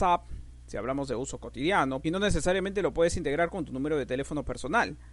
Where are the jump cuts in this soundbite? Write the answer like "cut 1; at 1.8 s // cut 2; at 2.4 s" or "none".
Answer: cut 1; at 2.0 s